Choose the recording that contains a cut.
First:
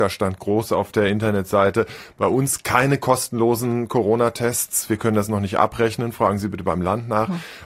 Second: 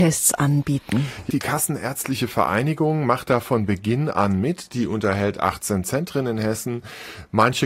second; 1 cut; at 1.3 s

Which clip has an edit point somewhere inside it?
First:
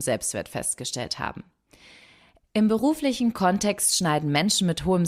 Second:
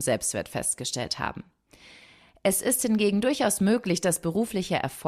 first; 1 cut; at 2.4 s

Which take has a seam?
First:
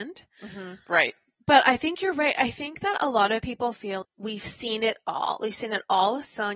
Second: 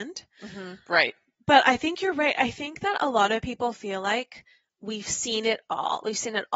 first; 1 cut; at 4.0 s

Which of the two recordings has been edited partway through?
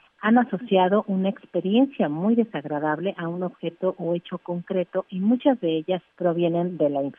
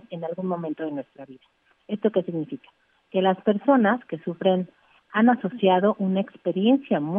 first; 1 cut; at 6.1 s

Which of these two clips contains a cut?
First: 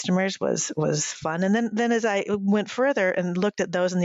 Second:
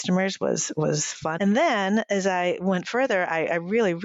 second; 1 cut; at 1.4 s

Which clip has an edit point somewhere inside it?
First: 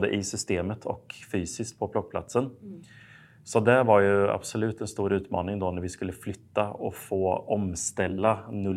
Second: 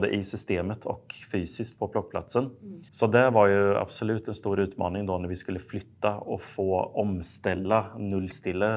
second; 1 cut; at 2.9 s

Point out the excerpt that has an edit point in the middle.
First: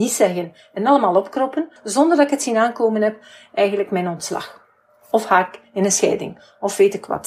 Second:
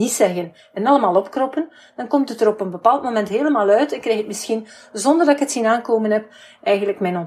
first; 1 cut; at 1.8 s

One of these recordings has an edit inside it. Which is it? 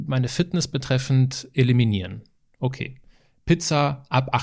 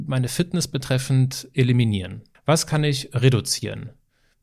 second; 1 cut; at 2.3 s

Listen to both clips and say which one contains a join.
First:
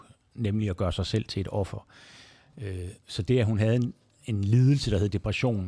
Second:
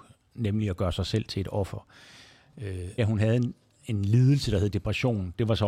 second; 1 cut; at 3.0 s

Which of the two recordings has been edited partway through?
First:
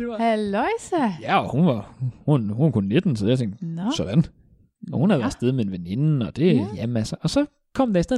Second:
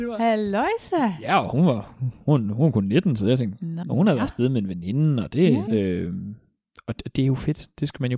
second; 2 cuts; at 3.8 s, 5.7 s

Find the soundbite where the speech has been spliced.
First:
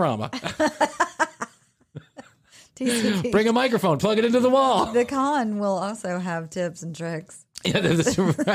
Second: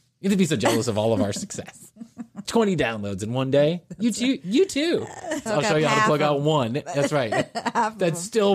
second; 2 cuts; at 2.4 s, 5.5 s

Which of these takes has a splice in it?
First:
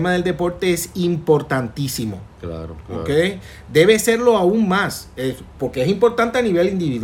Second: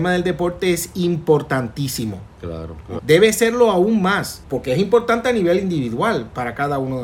second; 2 cuts; at 3.0 s, 4.4 s

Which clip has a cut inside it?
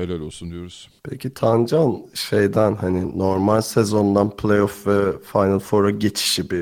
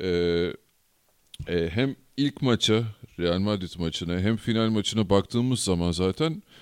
first; 1 cut; at 1.0 s

